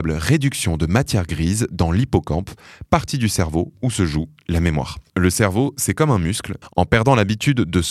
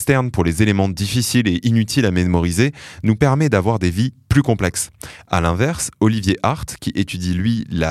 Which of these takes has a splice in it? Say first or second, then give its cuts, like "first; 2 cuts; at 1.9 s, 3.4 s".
first; 2 cuts; at 5.1 s, 6.6 s